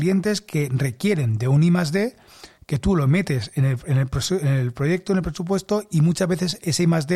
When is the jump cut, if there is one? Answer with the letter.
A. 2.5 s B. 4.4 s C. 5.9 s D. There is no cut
D